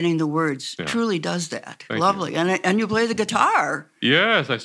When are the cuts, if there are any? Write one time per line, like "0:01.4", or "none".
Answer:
0:01.9